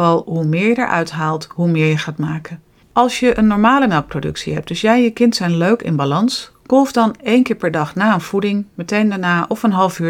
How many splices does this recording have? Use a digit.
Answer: 1